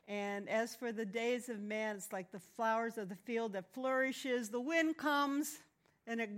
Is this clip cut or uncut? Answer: uncut